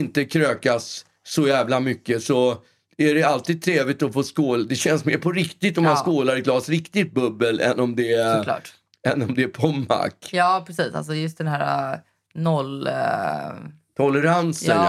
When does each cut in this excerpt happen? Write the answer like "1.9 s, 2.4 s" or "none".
none